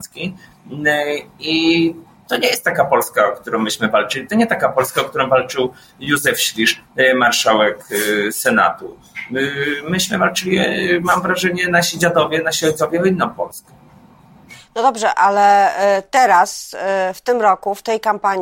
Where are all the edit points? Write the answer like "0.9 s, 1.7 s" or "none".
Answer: none